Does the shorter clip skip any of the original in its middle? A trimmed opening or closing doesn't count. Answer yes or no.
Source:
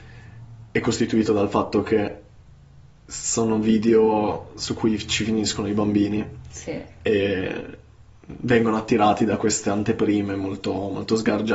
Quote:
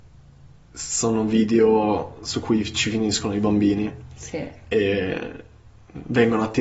no